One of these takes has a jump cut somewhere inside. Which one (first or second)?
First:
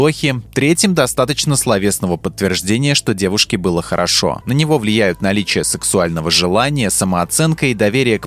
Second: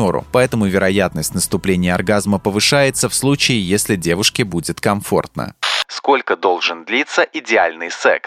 first